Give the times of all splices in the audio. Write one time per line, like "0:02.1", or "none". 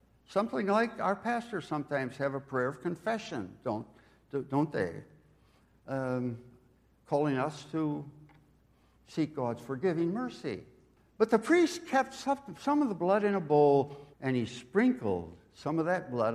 0:11.0
0:14.1